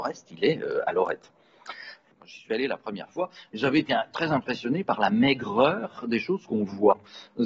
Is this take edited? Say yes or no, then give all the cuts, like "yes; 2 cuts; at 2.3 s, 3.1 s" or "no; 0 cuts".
yes; 1 cut; at 2.1 s